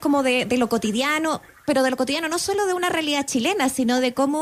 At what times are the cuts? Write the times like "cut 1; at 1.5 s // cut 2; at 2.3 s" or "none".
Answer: none